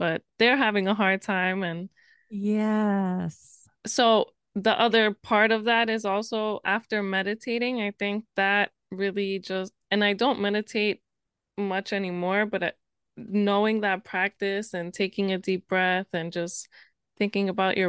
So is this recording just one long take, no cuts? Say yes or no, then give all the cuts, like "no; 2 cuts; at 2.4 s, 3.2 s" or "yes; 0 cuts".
yes; 0 cuts